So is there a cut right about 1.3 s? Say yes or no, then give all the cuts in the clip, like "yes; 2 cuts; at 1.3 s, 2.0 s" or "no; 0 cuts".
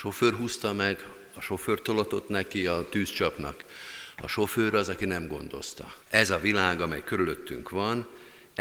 no; 1 cut; at 6.0 s